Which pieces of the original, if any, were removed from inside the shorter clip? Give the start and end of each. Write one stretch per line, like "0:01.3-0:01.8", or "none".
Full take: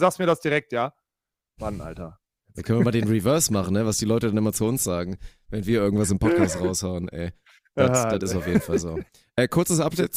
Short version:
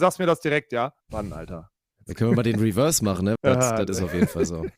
0:01.0-0:01.5
0:03.8-0:07.7